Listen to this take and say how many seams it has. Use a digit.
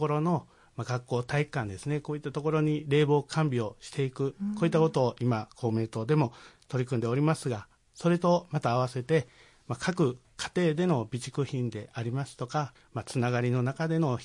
1